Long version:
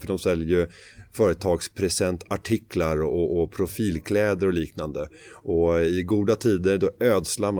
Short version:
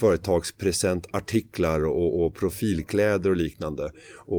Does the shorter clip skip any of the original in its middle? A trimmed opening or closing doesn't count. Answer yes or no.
no